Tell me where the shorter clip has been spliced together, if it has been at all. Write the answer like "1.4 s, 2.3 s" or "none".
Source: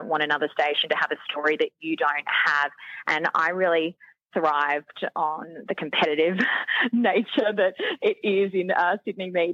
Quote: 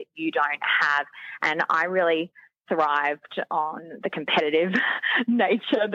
none